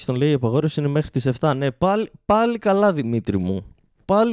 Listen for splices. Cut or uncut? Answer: uncut